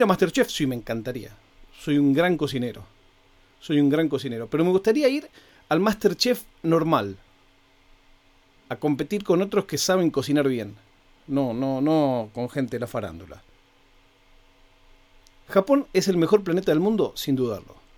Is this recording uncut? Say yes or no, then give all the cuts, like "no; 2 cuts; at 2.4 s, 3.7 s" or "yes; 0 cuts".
yes; 0 cuts